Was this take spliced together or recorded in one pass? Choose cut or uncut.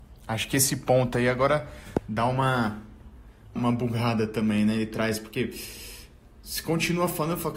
cut